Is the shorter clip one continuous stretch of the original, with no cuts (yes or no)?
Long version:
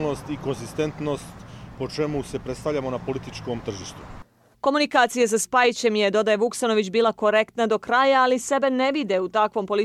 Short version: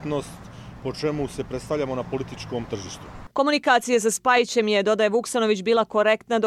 no